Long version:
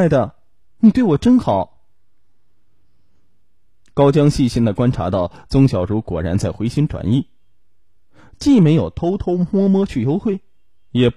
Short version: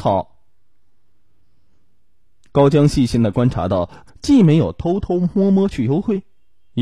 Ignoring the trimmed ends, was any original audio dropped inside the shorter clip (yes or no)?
yes